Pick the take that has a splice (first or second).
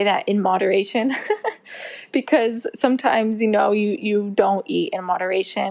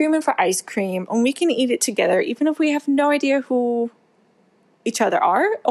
second